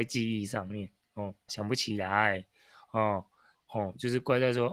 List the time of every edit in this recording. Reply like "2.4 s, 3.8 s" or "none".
1.5 s, 3.5 s